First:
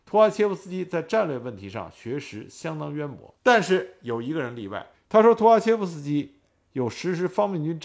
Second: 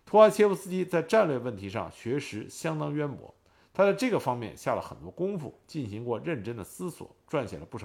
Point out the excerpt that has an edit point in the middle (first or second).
first